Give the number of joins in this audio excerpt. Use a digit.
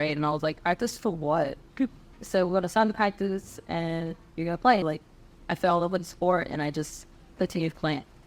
2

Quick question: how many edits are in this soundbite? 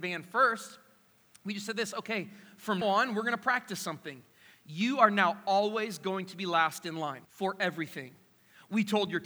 2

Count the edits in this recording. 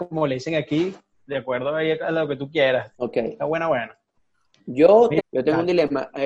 2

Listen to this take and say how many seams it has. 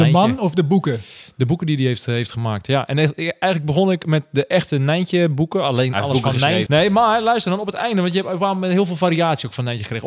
1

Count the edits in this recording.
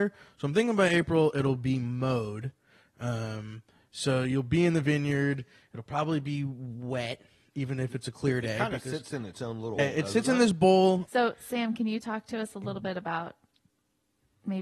2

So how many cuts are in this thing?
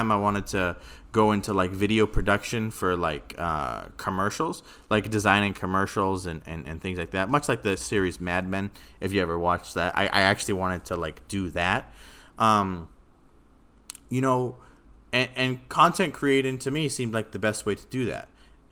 0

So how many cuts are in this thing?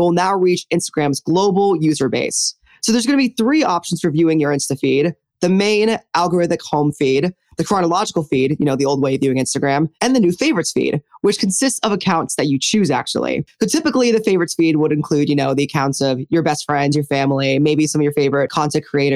1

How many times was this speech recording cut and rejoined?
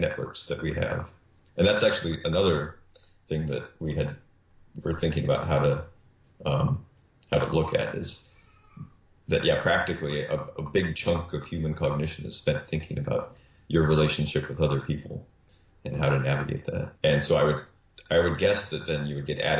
1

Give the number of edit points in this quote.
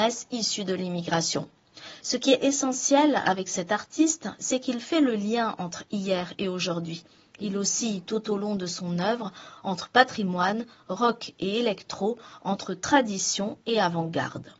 1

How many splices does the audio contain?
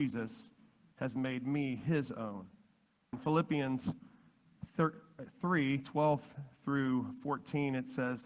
1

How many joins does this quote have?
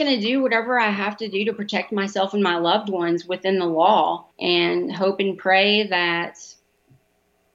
1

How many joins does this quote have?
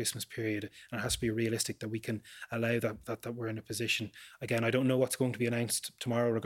0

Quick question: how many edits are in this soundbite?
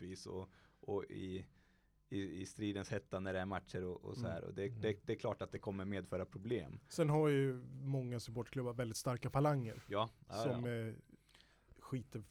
0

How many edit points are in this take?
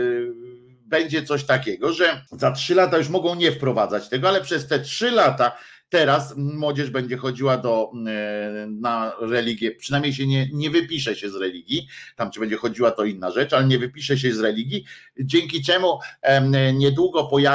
1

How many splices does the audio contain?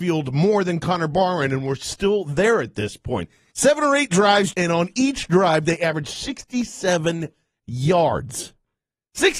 2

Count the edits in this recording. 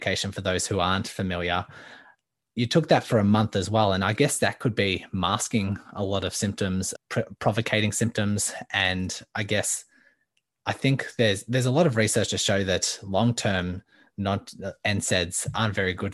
1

